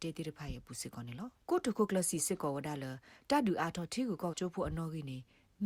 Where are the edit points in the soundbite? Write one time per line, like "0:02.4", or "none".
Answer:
0:01.4
0:04.3